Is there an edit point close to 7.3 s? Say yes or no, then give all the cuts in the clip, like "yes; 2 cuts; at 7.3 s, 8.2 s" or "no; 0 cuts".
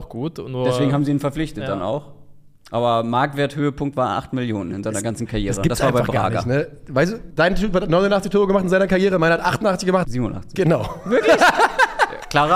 yes; 2 cuts; at 7.3 s, 10.0 s